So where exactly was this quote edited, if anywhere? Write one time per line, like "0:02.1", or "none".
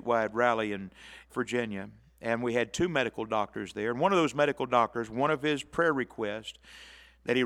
0:01.3